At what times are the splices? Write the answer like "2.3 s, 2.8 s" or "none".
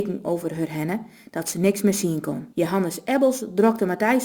2.5 s